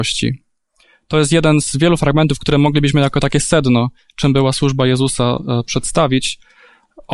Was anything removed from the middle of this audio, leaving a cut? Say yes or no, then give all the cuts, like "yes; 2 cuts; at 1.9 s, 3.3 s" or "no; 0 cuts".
no; 0 cuts